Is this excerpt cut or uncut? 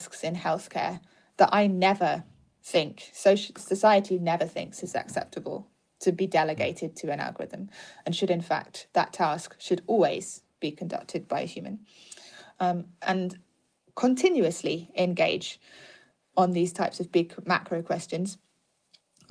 uncut